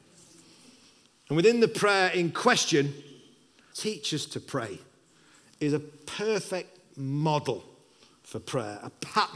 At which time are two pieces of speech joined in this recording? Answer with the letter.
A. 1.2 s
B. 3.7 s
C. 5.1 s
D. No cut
B